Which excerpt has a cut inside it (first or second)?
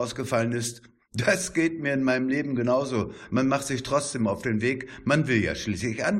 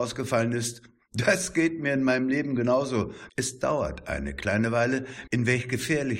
second